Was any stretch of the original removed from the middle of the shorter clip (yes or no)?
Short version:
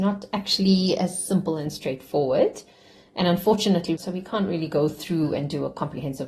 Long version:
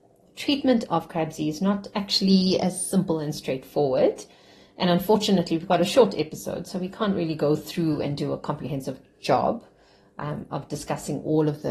yes